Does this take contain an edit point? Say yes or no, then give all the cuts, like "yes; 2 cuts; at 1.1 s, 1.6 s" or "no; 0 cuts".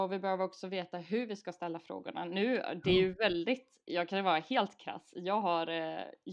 no; 0 cuts